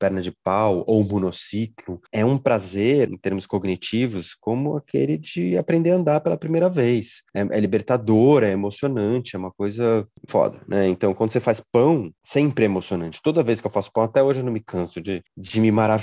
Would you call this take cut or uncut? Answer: cut